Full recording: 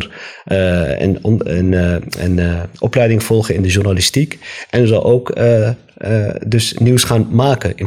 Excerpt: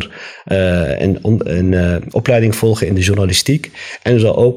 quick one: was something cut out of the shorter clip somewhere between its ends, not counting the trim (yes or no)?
yes